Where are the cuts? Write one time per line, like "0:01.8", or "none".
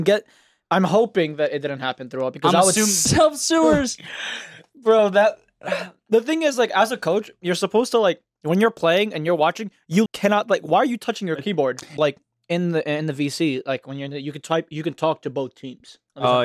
0:03.1
0:10.1
0:12.0

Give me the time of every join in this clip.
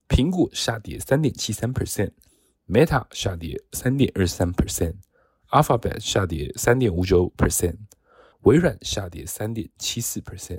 0:08.3

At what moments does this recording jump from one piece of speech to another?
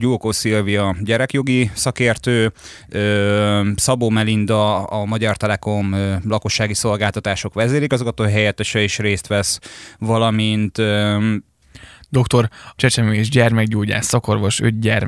0:12.8

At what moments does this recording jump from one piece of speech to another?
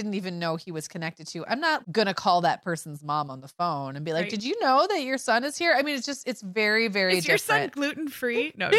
0:01.8

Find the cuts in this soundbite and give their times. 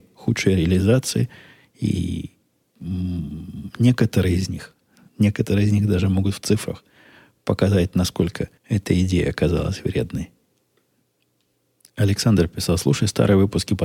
0:08.6

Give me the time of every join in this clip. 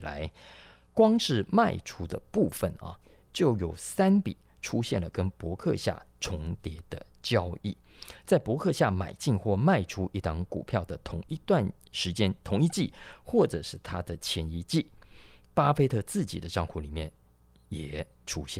none

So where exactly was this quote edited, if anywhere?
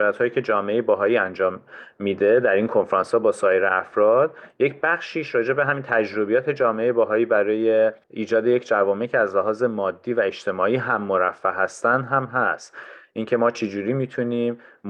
0:08.0

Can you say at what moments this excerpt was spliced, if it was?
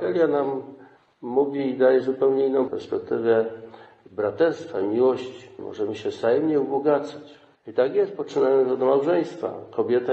0:02.7
0:05.6

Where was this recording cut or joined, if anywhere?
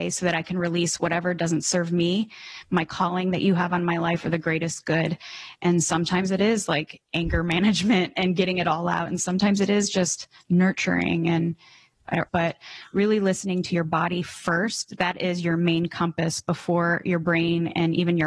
0:12.3

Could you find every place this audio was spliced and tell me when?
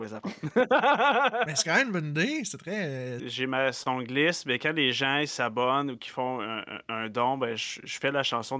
0:03.2

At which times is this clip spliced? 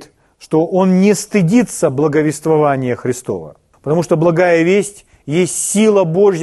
0:03.7

